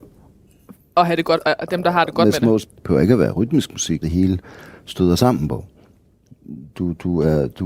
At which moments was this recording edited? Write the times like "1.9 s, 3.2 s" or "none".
2.6 s, 4.0 s, 6.7 s